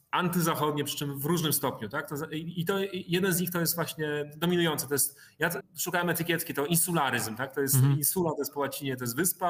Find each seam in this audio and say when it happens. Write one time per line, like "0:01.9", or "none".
0:05.6